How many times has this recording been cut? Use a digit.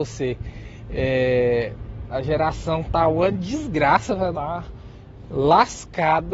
1